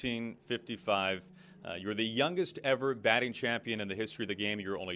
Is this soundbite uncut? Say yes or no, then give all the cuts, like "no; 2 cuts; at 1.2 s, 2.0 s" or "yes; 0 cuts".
yes; 0 cuts